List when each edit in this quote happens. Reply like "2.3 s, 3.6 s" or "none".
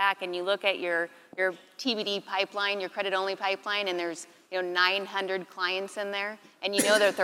none